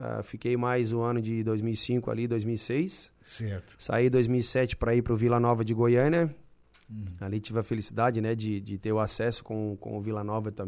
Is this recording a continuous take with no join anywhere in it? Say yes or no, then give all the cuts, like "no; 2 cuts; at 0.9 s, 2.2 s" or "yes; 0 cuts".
yes; 0 cuts